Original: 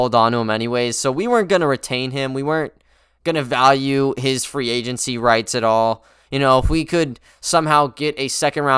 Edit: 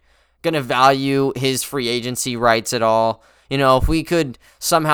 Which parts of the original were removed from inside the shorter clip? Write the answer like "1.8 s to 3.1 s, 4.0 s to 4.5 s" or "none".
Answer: none